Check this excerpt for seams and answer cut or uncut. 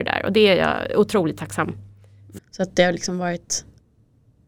cut